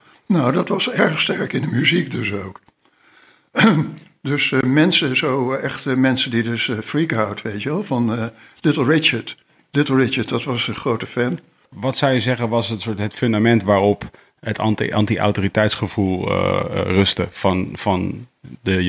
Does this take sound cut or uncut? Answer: cut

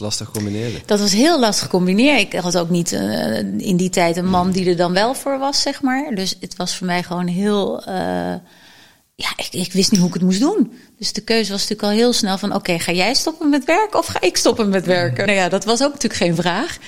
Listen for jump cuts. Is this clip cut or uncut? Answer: cut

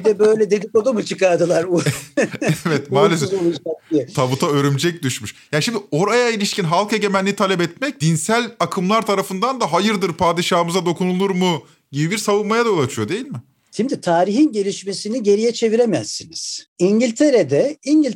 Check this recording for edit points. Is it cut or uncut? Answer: uncut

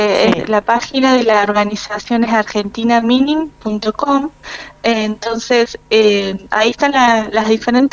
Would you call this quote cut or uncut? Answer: uncut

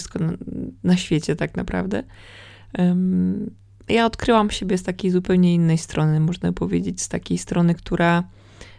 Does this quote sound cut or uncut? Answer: uncut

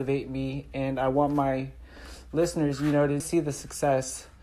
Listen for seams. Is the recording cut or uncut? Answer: cut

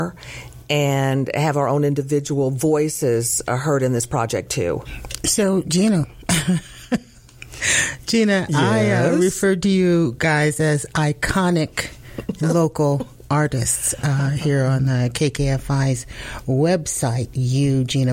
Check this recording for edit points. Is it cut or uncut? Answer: uncut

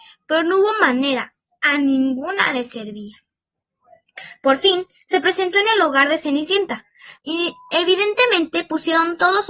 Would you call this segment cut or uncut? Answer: cut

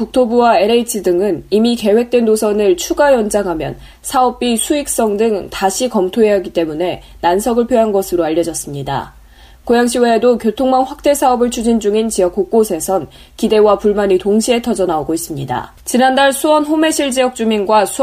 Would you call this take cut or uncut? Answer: uncut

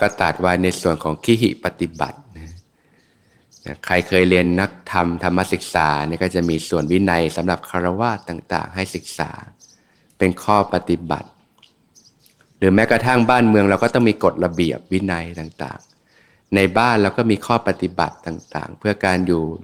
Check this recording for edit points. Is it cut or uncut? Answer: uncut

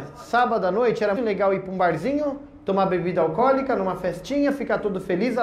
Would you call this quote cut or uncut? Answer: cut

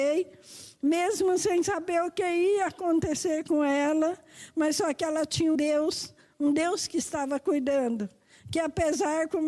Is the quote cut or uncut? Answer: cut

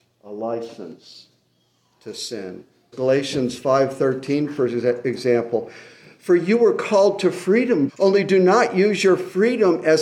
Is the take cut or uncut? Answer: cut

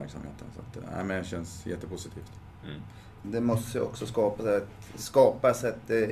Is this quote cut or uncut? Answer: cut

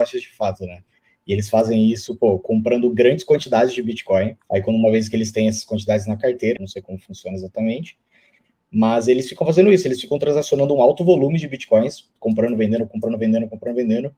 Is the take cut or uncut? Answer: cut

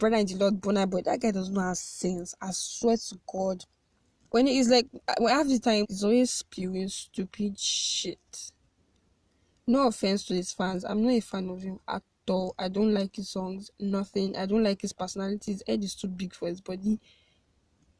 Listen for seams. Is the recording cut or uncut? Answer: cut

